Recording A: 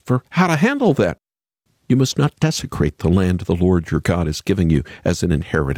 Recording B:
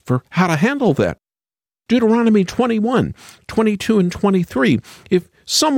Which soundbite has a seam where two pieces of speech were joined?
A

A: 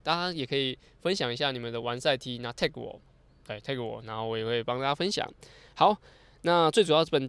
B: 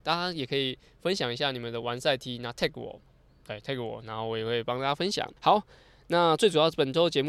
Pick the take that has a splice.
B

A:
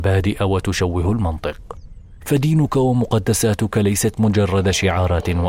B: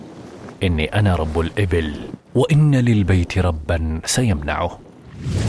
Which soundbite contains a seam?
B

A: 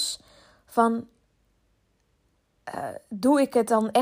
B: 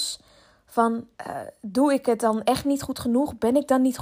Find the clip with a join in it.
B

